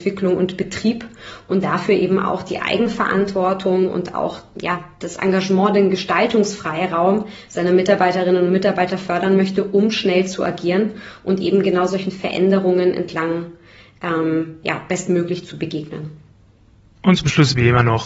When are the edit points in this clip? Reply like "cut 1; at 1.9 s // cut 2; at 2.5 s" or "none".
none